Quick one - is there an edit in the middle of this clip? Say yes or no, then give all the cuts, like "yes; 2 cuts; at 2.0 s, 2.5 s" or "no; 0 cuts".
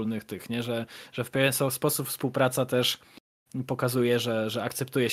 no; 0 cuts